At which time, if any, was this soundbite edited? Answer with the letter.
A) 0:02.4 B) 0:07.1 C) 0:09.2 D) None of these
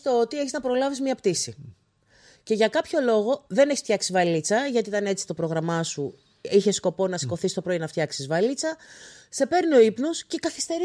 D